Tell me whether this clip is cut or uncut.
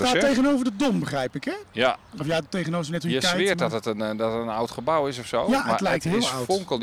uncut